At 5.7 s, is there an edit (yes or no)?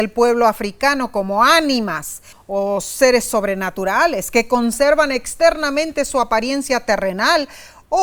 no